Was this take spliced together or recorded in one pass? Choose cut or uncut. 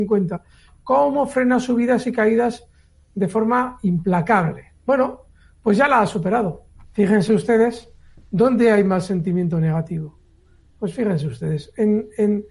cut